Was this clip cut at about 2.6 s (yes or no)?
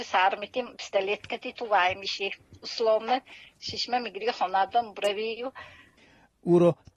no